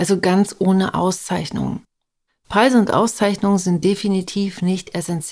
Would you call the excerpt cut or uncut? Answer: cut